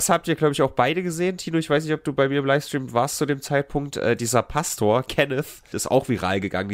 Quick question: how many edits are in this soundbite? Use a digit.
1